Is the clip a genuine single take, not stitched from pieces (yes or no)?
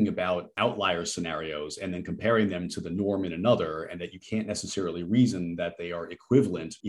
yes